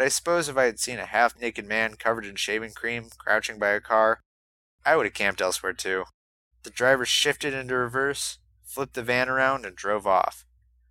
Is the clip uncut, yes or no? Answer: no